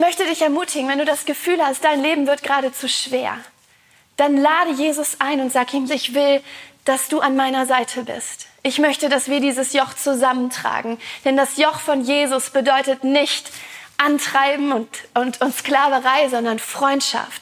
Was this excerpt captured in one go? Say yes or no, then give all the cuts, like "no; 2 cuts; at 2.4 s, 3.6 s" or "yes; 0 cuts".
no; 1 cut; at 5.9 s